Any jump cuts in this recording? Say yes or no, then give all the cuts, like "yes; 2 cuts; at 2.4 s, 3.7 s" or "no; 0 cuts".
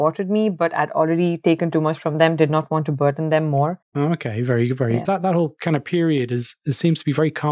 yes; 2 cuts; at 3.8 s, 5.0 s